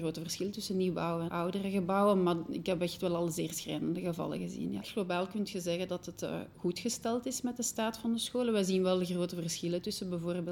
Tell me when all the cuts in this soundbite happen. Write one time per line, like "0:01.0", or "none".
0:01.3
0:04.8